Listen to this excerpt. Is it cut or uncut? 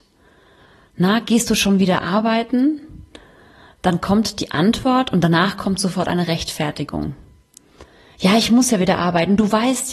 uncut